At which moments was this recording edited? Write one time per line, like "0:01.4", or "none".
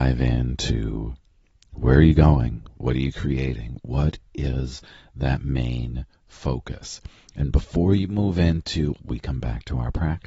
0:09.0